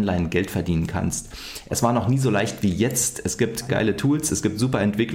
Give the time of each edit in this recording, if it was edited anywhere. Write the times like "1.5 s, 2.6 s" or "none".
3.7 s